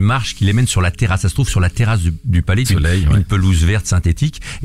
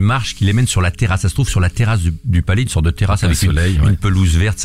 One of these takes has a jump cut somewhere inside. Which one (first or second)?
first